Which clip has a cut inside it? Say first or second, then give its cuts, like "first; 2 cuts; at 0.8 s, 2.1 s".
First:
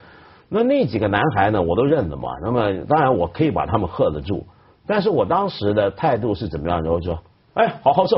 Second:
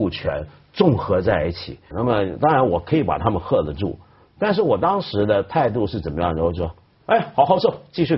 second; 1 cut; at 1.9 s